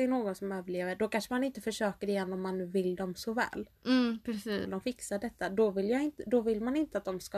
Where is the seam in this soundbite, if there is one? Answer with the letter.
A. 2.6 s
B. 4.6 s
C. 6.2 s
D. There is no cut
B